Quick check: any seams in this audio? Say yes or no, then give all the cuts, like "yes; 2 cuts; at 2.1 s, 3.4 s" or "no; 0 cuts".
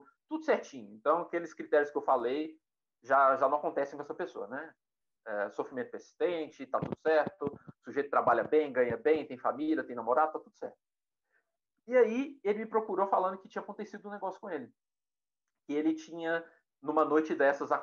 no; 0 cuts